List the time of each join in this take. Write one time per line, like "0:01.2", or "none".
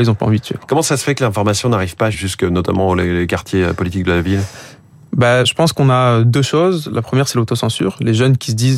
0:02.1